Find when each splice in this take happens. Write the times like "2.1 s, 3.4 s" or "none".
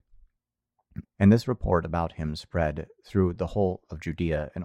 1.0 s

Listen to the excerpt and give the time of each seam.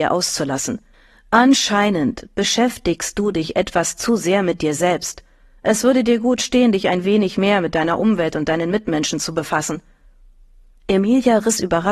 none

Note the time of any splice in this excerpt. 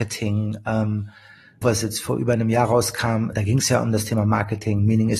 1.6 s, 3.3 s

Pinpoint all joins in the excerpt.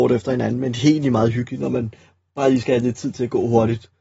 none

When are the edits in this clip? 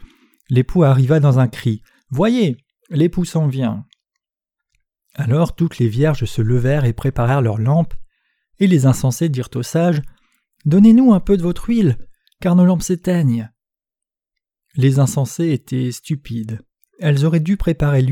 none

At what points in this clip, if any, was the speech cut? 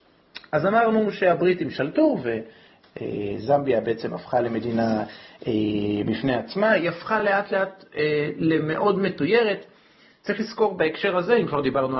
none

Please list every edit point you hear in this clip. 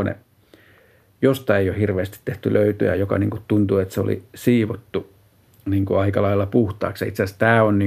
none

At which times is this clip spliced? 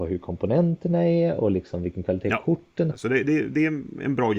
2.9 s

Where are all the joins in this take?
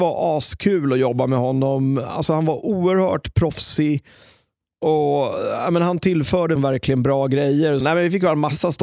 6.6 s, 7.8 s

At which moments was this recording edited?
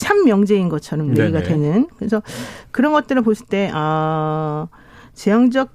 none

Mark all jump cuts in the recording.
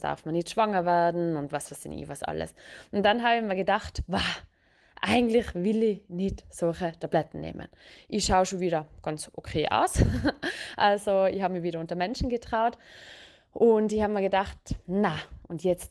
none

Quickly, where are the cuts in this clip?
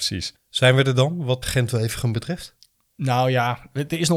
1.4 s

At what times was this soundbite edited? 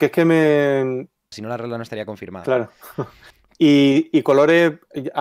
1.3 s

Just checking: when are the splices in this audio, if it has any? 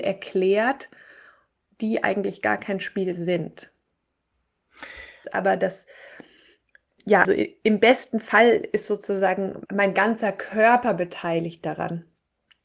5.2 s, 7.2 s, 9.7 s

